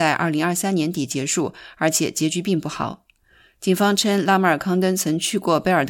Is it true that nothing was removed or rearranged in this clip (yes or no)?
yes